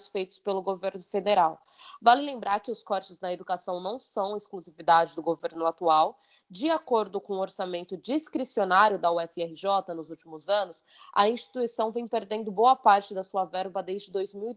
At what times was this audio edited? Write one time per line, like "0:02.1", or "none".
0:02.0